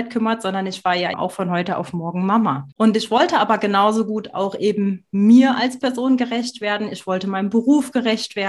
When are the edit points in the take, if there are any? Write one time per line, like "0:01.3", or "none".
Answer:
0:01.1
0:02.7